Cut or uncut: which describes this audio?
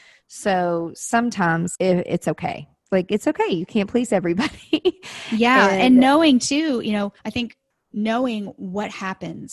cut